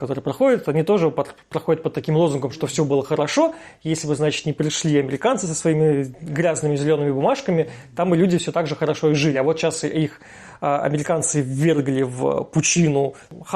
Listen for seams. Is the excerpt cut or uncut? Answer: uncut